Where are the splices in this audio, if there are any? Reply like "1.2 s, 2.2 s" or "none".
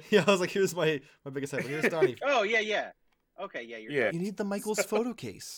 4.1 s